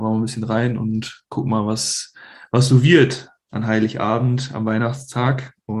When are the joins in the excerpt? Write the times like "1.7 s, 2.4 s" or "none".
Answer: none